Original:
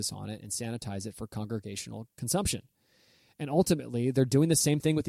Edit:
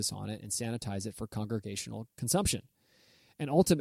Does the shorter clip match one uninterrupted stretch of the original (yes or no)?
yes